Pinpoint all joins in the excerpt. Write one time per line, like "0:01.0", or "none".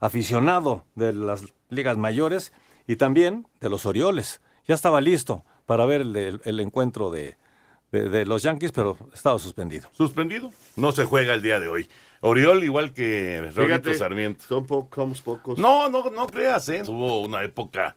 0:16.8